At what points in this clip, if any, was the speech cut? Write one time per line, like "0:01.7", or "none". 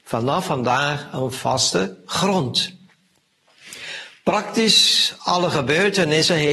none